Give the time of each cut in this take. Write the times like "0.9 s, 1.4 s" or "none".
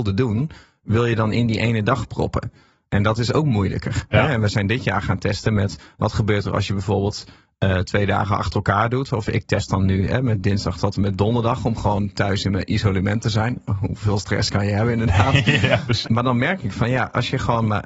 16.0 s